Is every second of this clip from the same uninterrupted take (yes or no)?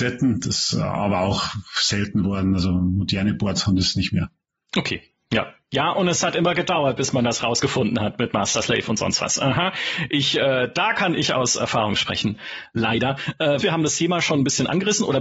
no